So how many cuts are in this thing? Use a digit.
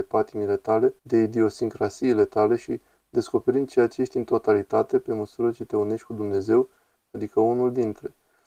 2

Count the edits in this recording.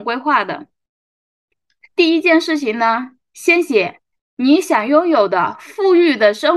0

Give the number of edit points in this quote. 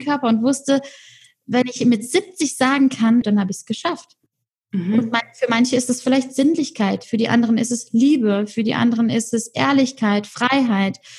2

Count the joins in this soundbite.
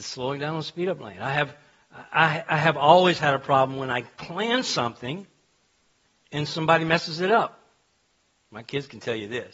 0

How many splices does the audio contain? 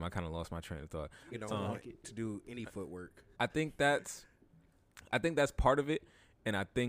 2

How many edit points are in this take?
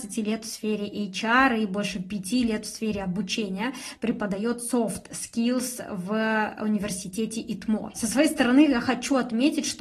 1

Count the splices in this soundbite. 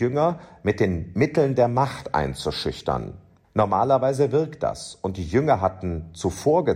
1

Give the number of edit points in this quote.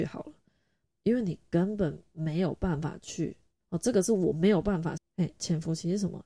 2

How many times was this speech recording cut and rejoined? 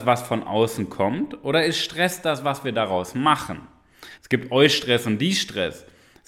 1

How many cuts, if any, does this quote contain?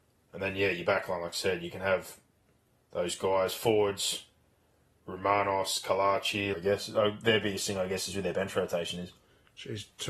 1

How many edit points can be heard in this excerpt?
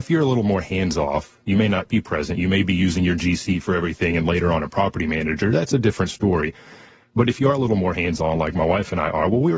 0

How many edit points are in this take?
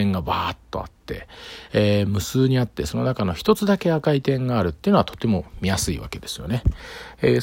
0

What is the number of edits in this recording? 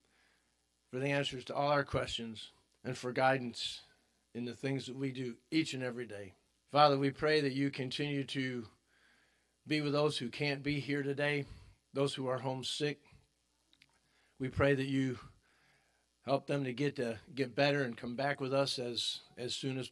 2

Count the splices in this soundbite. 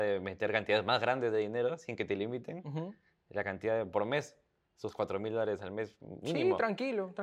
0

